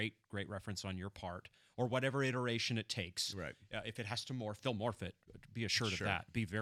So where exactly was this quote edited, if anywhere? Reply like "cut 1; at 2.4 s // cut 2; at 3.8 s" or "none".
none